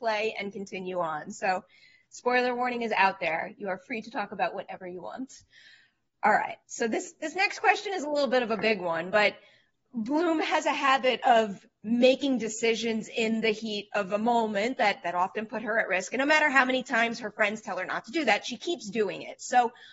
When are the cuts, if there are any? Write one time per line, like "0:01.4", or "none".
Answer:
0:06.6